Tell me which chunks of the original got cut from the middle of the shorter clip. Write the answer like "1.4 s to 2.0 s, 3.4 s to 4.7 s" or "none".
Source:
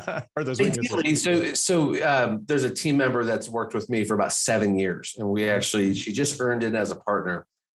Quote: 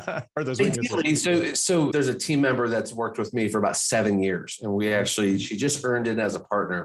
1.9 s to 2.5 s